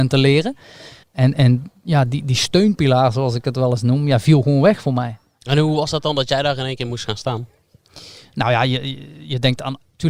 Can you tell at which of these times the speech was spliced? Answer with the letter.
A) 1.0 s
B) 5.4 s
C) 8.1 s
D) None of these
A